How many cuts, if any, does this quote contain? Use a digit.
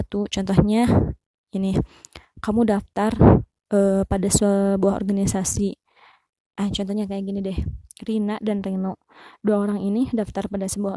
0